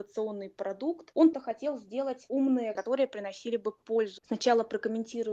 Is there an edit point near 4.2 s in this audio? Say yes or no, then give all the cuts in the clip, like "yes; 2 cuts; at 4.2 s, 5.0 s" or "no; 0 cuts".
yes; 3 cuts; at 1.3 s, 2.8 s, 4.2 s